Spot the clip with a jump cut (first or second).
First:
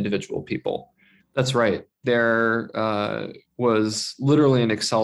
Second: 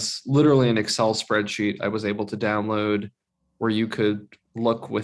first